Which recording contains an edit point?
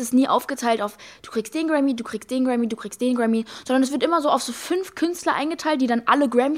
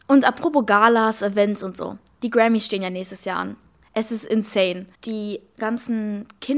second; 2 cuts; at 3.8 s, 4.9 s

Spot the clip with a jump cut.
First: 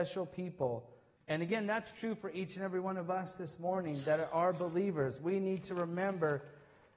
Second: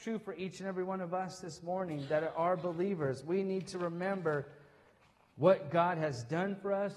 first; 1 cut; at 1.2 s

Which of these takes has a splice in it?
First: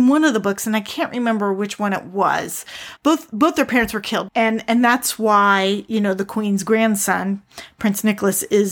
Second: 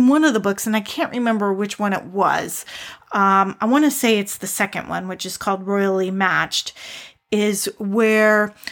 first; 2 cuts; at 3.0 s, 4.3 s

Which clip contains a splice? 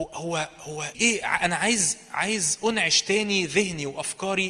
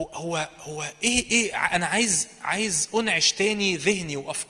first; 1 cut; at 0.9 s

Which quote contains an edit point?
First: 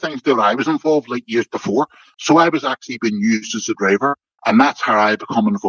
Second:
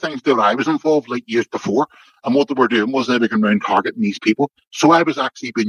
first; 2 cuts; at 2.1 s, 4.4 s

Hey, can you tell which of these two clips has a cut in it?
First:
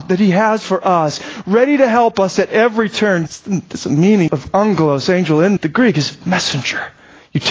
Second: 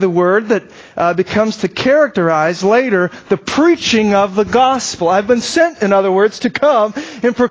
first; 3 cuts; at 3.3 s, 4.3 s, 5.6 s

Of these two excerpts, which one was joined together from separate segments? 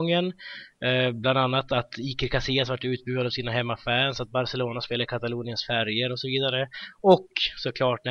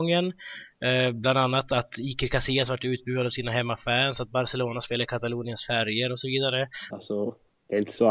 second; 1 cut; at 6.9 s

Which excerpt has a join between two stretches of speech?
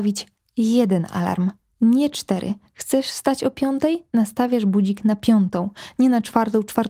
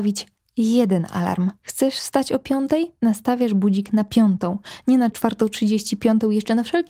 second; 2 cuts; at 1.6 s, 5.1 s

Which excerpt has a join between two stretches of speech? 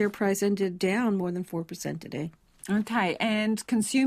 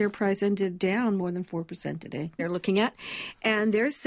second; 1 cut; at 2.4 s

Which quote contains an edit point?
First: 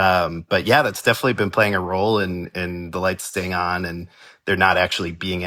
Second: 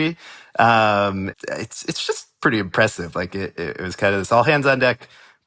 second; 1 cut; at 1.3 s

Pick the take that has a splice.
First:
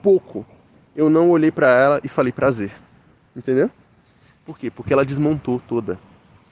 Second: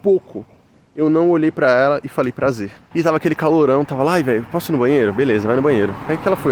second; 1 cut; at 2.9 s

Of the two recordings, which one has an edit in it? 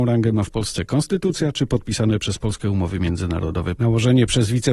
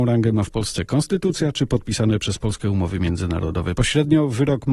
first; 1 cut; at 3.8 s

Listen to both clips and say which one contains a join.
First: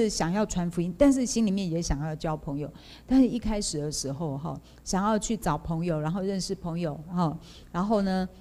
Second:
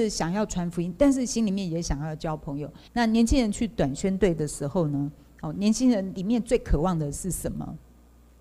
second; 1 cut; at 2.9 s

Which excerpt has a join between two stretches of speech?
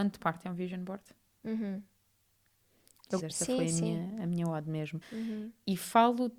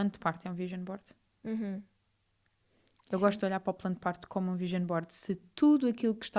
first; 2 cuts; at 3.2 s, 5.0 s

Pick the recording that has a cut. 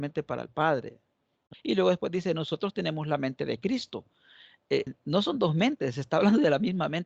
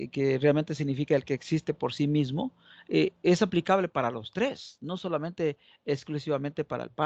first; 2 cuts; at 1.5 s, 4.9 s

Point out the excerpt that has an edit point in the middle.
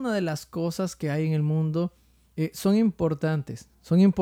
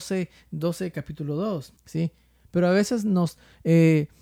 second; 1 cut; at 1.8 s

